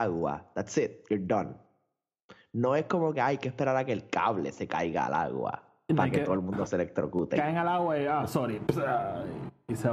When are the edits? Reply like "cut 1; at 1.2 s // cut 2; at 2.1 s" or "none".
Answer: cut 1; at 7.4 s